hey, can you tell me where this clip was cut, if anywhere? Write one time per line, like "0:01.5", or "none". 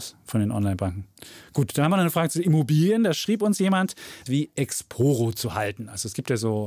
0:04.3